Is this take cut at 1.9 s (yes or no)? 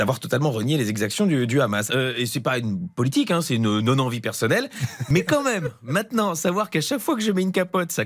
yes